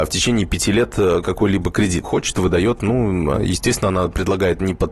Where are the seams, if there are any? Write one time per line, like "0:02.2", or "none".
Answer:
0:02.0